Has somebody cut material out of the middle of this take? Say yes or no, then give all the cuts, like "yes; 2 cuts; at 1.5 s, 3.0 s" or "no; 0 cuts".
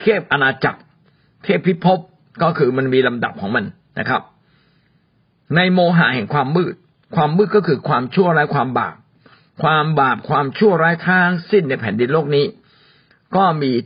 no; 0 cuts